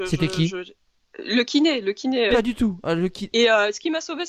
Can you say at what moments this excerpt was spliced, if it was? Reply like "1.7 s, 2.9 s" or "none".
2.3 s, 3.3 s